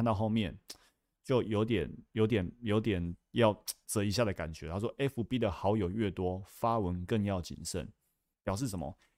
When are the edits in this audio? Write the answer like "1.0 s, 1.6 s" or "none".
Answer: 3.8 s